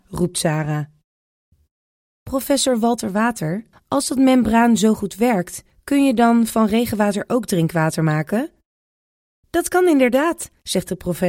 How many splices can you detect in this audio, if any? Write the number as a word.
one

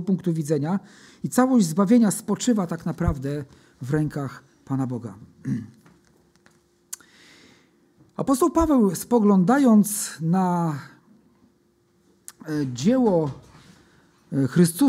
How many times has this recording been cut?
zero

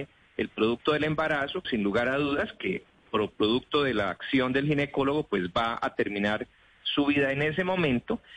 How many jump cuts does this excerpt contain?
one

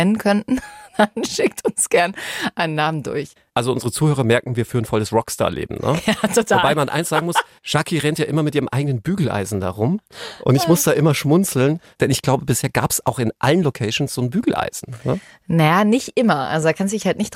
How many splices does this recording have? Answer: zero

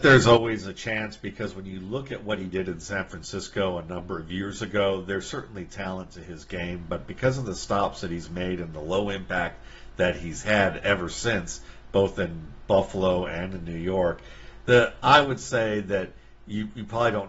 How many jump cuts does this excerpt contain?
zero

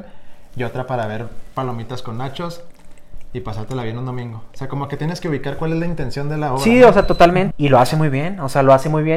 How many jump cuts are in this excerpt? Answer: one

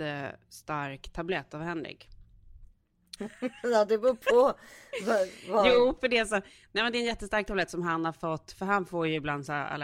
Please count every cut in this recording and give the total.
one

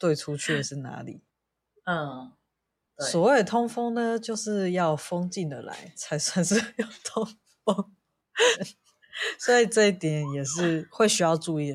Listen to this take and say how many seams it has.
two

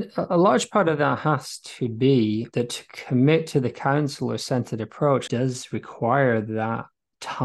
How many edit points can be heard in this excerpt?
one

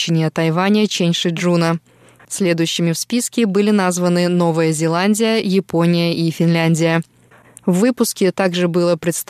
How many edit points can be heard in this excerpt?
two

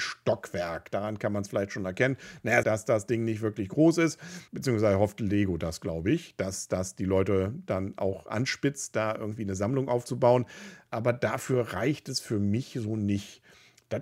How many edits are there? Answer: two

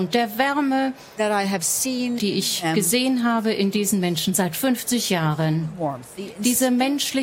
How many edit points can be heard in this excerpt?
one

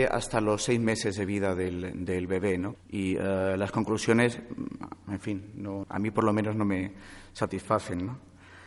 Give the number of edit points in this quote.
two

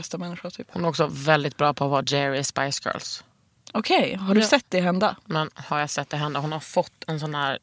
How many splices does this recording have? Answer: zero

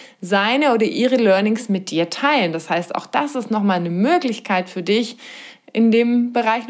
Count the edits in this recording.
zero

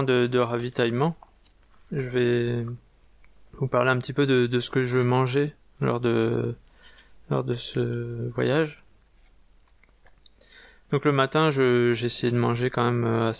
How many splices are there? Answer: zero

